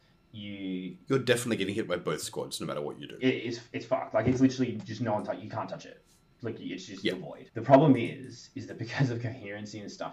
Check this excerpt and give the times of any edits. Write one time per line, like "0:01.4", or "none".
0:07.5